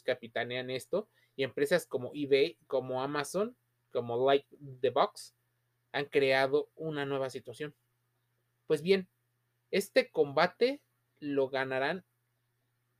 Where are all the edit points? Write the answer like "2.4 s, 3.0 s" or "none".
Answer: none